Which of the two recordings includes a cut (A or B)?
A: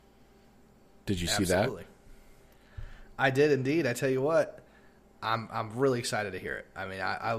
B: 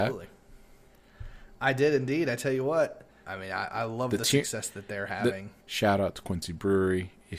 B